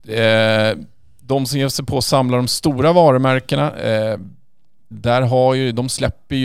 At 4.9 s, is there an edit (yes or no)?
yes